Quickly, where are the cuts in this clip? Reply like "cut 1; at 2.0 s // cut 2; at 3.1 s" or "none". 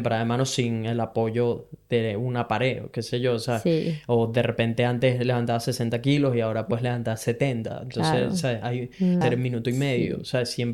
cut 1; at 9.2 s